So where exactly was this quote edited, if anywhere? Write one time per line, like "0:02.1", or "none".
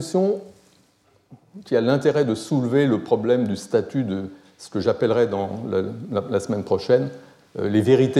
none